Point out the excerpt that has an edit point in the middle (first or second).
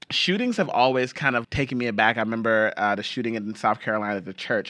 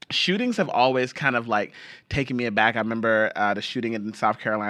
first